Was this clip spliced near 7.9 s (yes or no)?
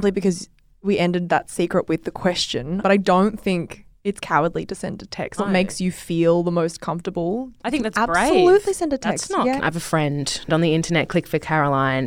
no